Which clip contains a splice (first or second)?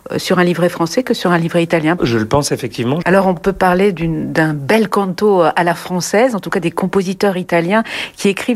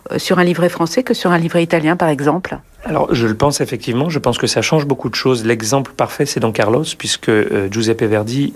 first